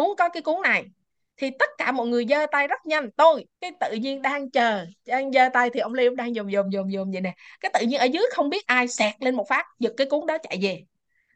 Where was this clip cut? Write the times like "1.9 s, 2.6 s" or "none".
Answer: 3.5 s